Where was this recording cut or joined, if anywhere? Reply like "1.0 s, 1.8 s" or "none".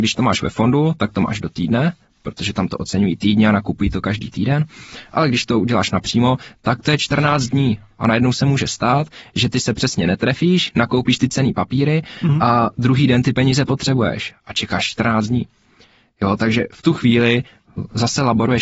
none